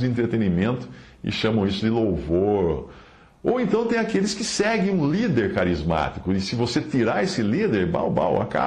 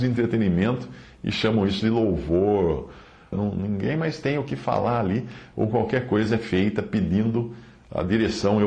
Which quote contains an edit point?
second; 1 cut; at 3.3 s

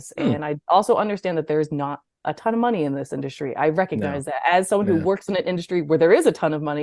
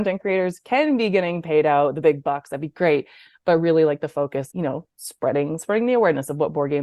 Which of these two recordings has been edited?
second; 1 cut; at 4.5 s

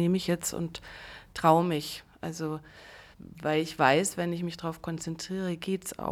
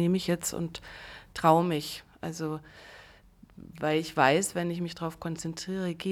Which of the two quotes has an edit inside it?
first; 1 cut; at 3.1 s

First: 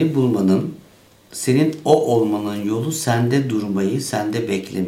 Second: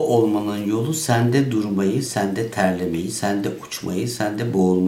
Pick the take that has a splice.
second; 1 cut; at 2.0 s

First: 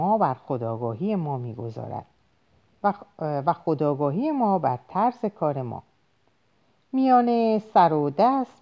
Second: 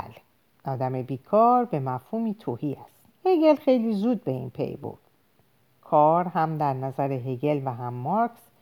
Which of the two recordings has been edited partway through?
second; 1 cut; at 3.1 s

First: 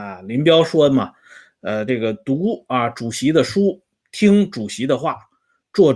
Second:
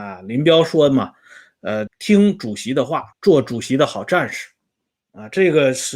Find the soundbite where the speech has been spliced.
second; 2 cuts; at 1.9 s, 3.1 s

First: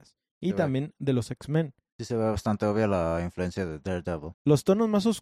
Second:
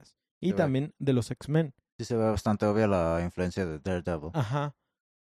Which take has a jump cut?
first; 1 cut; at 4.3 s

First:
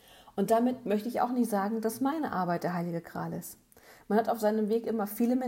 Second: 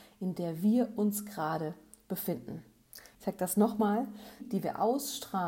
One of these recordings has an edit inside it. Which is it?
second; 2 cuts; at 3.1 s, 4.4 s

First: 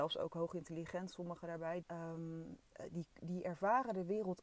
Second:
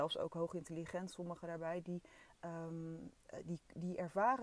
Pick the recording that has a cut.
first; 1 cut; at 1.8 s

